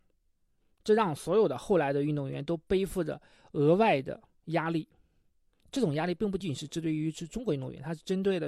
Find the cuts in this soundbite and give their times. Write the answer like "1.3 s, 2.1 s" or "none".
6.4 s